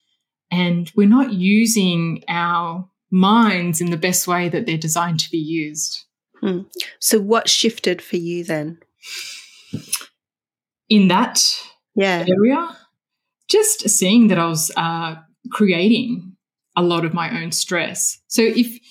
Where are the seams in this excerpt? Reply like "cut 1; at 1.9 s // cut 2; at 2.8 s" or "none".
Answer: none

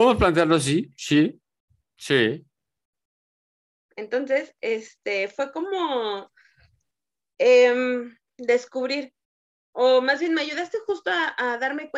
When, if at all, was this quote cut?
none

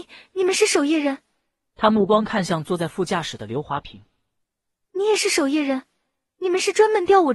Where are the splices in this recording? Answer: none

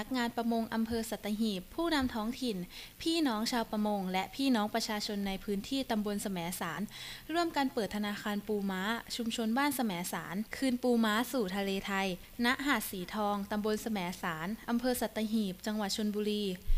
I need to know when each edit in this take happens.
none

